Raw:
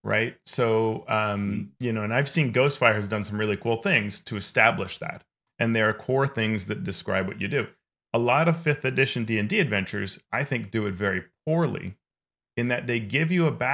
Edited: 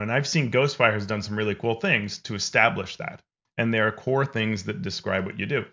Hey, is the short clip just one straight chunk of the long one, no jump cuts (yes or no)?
yes